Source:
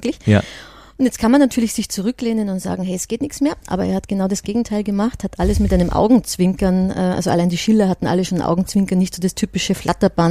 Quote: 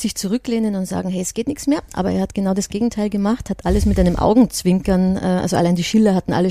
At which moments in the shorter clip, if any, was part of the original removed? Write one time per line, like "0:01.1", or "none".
none